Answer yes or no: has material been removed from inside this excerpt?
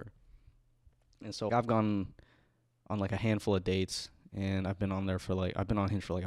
yes